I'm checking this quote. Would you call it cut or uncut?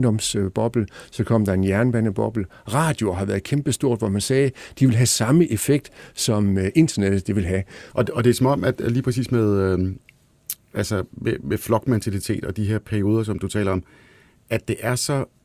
cut